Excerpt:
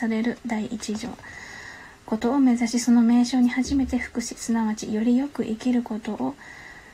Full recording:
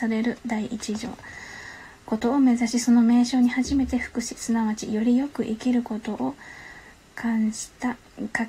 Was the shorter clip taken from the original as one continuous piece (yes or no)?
yes